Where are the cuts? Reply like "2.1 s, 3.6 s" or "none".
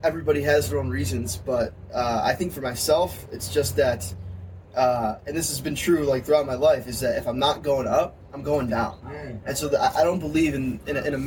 none